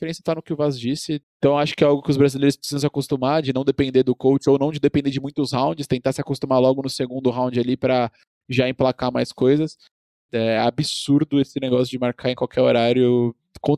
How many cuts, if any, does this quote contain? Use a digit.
2